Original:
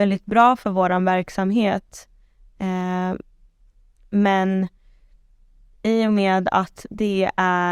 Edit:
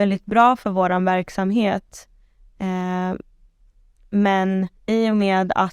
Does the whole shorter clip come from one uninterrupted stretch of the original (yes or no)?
no